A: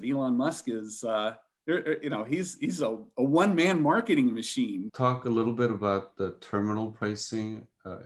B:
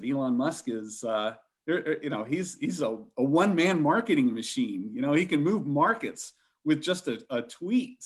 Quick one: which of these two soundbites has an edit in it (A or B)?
A